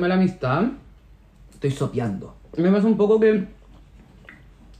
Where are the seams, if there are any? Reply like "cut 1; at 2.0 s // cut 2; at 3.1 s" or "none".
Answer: cut 1; at 1.3 s // cut 2; at 2.5 s